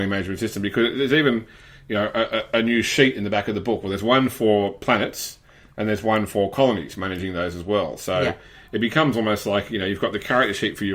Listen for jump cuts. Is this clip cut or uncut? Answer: uncut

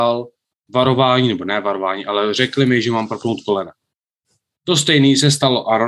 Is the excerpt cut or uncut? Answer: uncut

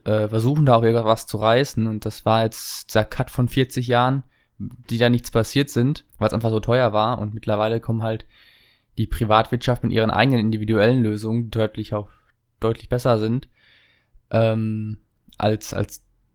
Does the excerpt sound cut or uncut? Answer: cut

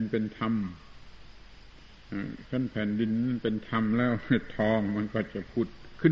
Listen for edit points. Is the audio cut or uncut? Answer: uncut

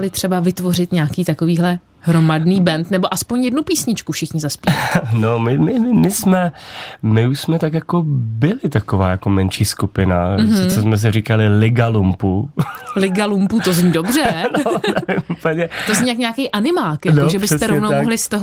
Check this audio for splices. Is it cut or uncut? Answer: uncut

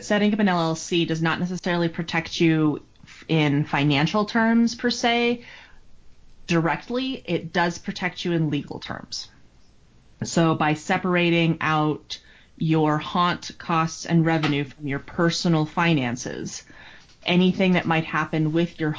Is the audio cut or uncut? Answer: uncut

